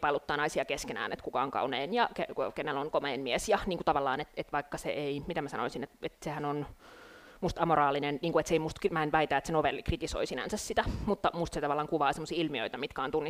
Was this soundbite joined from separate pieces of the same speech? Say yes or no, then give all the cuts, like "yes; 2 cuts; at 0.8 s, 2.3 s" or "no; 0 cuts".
no; 0 cuts